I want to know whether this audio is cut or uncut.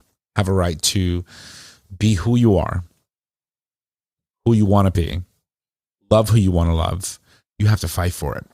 uncut